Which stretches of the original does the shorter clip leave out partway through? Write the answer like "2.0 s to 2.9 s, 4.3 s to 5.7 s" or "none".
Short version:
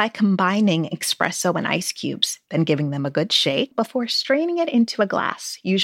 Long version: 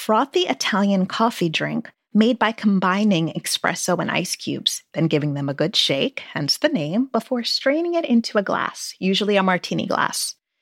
6.1 s to 7.1 s